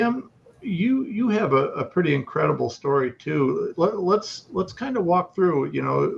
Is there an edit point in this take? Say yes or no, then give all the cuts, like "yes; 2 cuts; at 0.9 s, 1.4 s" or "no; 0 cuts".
no; 0 cuts